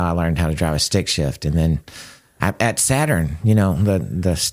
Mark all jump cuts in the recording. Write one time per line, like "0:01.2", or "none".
none